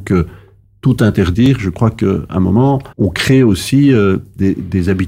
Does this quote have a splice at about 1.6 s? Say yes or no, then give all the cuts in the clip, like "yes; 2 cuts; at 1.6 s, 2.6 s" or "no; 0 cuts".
no; 1 cut; at 2.9 s